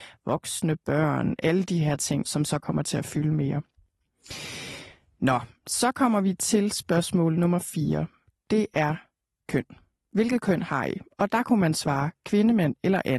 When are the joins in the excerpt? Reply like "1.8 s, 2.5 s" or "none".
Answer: 2.2 s